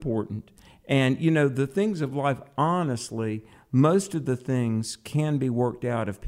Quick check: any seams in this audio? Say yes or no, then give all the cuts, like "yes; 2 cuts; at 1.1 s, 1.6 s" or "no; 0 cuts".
no; 0 cuts